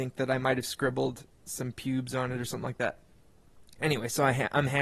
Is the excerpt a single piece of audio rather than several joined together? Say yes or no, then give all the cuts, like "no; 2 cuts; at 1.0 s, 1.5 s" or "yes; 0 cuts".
yes; 0 cuts